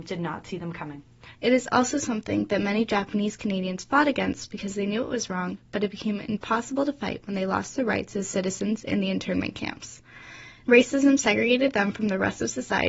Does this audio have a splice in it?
yes; 2 cuts; at 1.3 s, 10.6 s

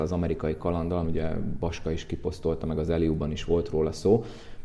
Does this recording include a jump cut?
yes; 1 cut; at 1.0 s

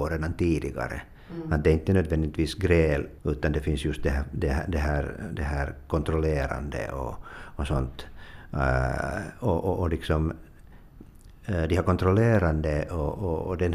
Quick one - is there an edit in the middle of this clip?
yes; 1 cut; at 3.2 s

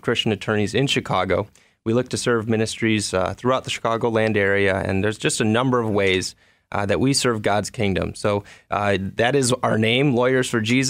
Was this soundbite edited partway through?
no; 0 cuts

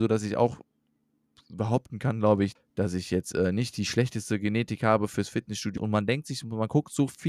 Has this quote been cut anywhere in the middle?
yes; 2 cuts; at 2.6 s, 5.8 s

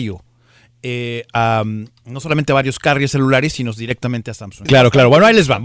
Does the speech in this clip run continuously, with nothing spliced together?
no; 1 cut; at 4.7 s

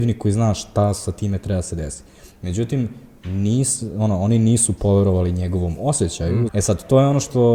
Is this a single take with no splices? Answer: no; 1 cut; at 6.5 s

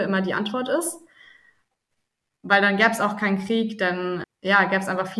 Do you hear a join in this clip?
yes; 1 cut; at 4.2 s

